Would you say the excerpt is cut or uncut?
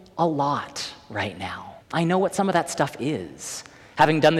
cut